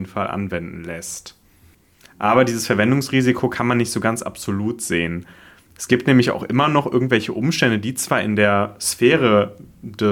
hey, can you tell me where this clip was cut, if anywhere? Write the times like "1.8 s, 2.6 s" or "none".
none